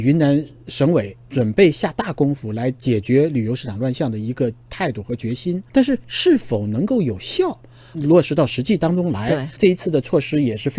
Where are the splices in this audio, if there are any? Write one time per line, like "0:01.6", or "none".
0:05.7
0:07.9
0:09.6